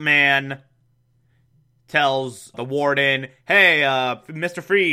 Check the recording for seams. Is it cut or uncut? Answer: cut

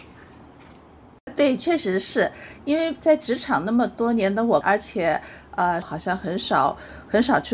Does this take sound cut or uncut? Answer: cut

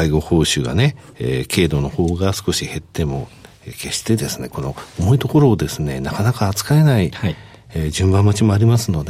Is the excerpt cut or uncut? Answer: uncut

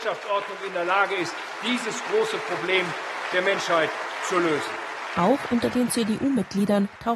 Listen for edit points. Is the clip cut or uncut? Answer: uncut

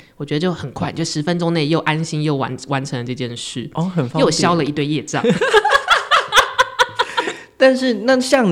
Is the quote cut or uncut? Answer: uncut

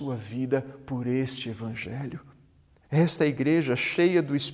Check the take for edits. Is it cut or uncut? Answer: cut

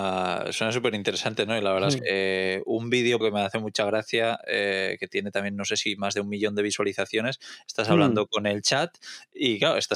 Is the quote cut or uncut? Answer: cut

